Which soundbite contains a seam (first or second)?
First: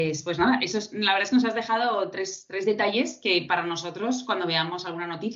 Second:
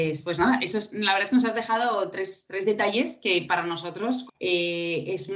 second